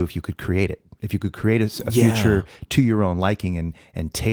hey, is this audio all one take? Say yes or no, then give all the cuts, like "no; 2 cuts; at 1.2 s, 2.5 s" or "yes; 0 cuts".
yes; 0 cuts